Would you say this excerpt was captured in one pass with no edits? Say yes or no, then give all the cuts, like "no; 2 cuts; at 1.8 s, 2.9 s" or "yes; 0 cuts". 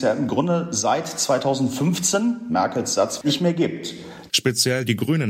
no; 2 cuts; at 3.2 s, 4.3 s